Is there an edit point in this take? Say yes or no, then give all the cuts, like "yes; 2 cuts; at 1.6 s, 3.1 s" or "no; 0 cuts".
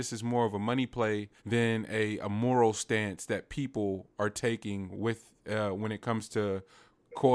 yes; 1 cut; at 1.4 s